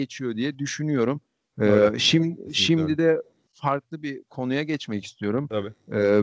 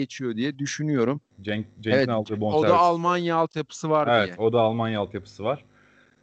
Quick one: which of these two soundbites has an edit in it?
second; 1 cut; at 1.3 s

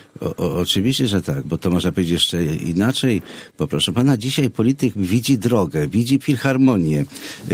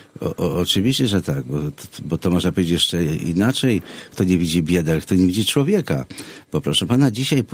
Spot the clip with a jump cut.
first; 3 cuts; at 1.4 s, 3.5 s, 6.2 s

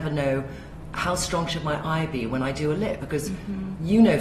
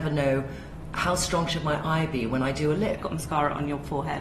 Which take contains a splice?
second; 1 cut; at 3.0 s

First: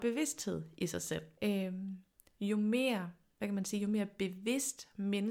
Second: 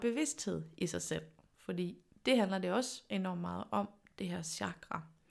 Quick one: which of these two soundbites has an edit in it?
first; 1 cut; at 1.4 s

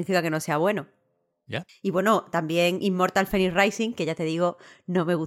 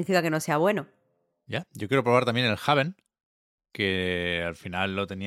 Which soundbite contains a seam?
first; 1 cut; at 1.7 s

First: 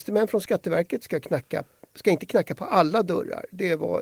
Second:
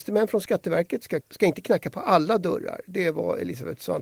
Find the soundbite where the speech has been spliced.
second; 1 cut; at 1.2 s

